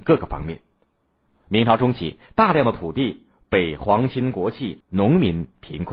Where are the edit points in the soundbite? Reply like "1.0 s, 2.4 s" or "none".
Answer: 1.3 s, 4.8 s